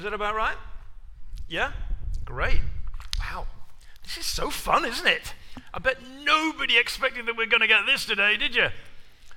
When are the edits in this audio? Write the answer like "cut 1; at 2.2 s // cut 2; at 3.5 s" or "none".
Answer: cut 1; at 3.1 s